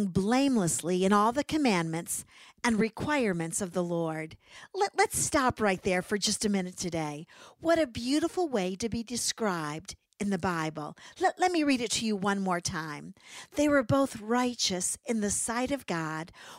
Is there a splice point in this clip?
no; 0 cuts

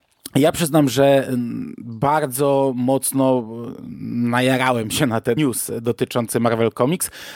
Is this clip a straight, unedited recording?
no; 1 cut; at 5.4 s

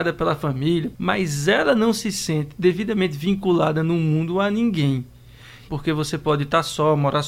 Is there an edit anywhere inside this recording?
yes; 2 cuts; at 0.9 s, 5.7 s

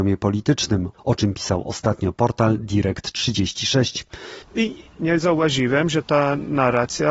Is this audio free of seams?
no; 1 cut; at 4.4 s

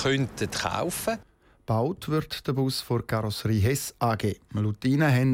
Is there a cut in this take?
no; 0 cuts

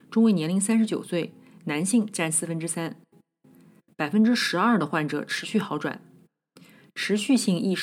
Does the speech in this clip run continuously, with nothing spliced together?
no; 1 cut; at 3.8 s

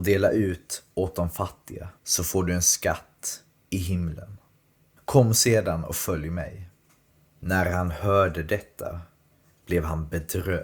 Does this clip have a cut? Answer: yes; 1 cut; at 2.0 s

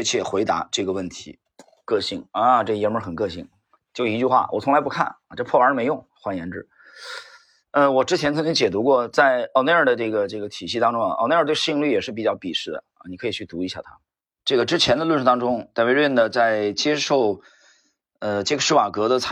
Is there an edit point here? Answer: yes; 1 cut; at 14.3 s

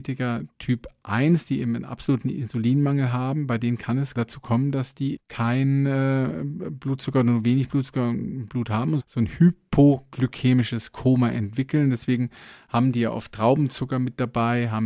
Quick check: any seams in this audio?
yes; 2 cuts; at 5.1 s, 9.0 s

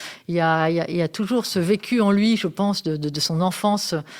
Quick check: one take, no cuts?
yes; 0 cuts

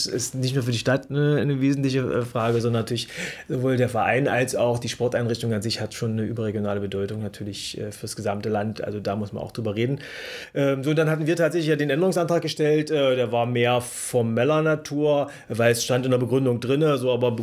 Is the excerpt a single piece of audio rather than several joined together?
yes; 0 cuts

